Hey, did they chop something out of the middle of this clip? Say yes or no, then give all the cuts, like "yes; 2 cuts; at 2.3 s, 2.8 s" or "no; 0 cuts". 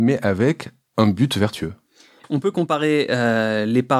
yes; 1 cut; at 2.2 s